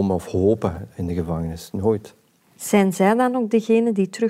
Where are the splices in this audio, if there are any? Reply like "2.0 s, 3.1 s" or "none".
none